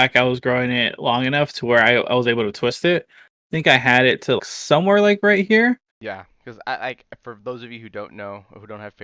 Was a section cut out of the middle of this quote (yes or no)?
yes